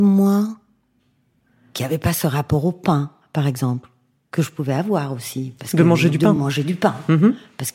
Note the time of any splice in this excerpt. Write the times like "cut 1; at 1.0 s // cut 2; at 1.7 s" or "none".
none